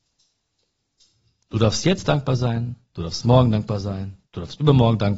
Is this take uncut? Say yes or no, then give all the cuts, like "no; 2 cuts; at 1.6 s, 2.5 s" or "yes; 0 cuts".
no; 1 cut; at 4.3 s